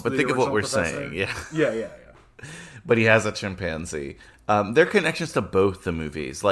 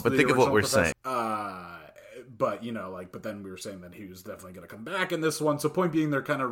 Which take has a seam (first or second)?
second